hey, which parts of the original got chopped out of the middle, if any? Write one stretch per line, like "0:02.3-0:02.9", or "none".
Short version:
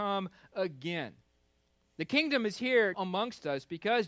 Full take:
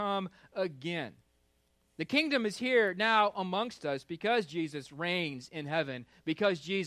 0:02.9-0:03.3